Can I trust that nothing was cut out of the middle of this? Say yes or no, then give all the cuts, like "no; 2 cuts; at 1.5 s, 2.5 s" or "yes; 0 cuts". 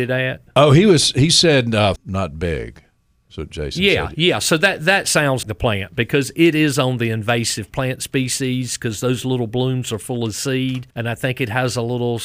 no; 3 cuts; at 2.0 s, 5.4 s, 10.9 s